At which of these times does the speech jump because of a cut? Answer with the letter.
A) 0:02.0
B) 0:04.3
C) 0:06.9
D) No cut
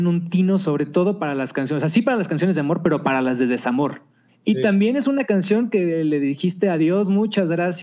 B